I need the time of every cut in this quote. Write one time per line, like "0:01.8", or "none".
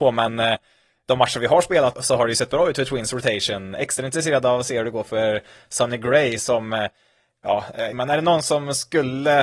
0:01.9
0:07.9